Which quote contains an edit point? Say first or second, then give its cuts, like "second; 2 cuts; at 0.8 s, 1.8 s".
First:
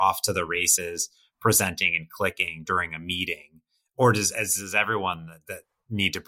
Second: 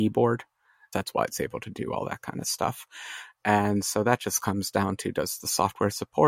second; 1 cut; at 0.9 s